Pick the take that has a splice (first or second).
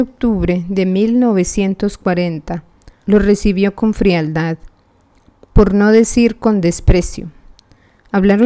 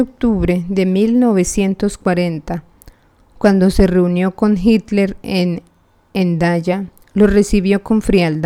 first